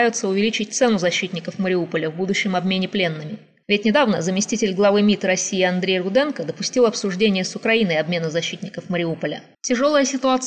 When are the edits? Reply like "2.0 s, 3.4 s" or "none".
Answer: 9.5 s